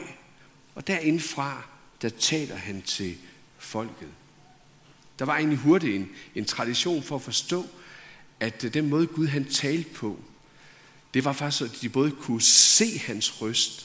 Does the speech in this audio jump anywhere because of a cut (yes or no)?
no